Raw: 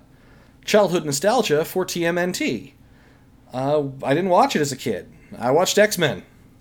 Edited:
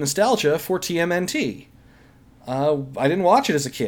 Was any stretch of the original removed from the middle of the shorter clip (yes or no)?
no